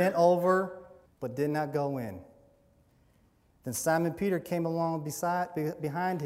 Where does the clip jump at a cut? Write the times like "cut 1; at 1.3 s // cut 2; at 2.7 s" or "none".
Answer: cut 1; at 1.0 s